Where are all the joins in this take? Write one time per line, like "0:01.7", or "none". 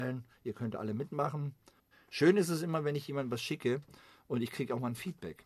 0:01.9